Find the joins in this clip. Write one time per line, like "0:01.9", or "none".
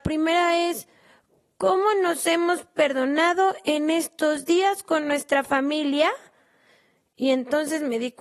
none